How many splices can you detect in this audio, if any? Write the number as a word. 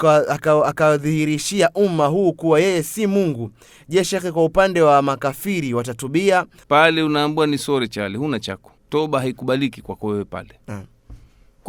two